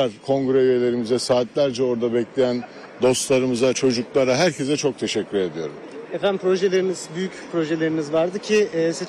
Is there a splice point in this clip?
no; 0 cuts

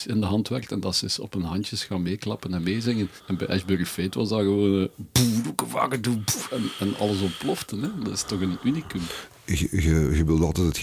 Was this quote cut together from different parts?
no; 0 cuts

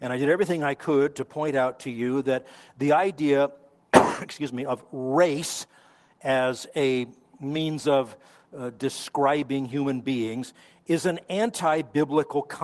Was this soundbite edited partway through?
no; 0 cuts

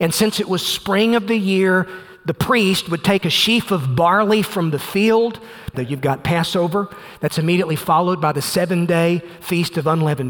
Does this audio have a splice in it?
yes; 1 cut; at 5.7 s

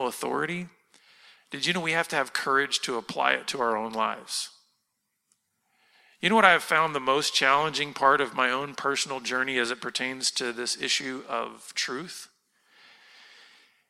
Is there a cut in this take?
no; 0 cuts

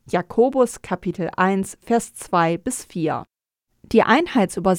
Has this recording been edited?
no; 0 cuts

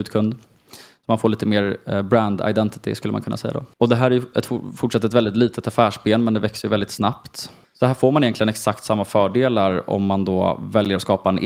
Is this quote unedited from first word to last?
no; 2 cuts; at 3.7 s, 7.6 s

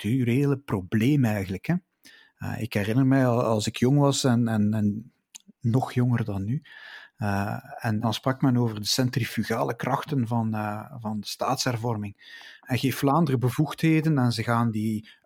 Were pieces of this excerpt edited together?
yes; 1 cut; at 8.0 s

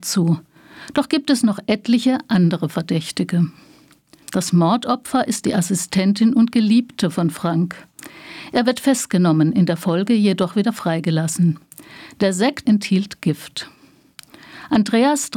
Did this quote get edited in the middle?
yes; 2 cuts; at 4.2 s, 12.7 s

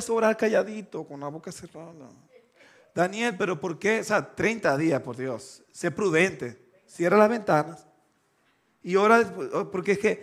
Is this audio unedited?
yes; 0 cuts

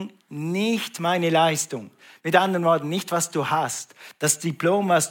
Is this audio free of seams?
yes; 0 cuts

